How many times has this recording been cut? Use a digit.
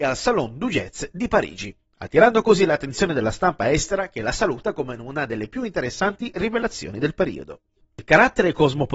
0